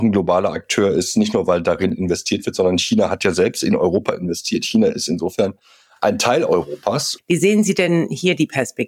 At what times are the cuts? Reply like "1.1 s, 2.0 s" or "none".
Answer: 7.2 s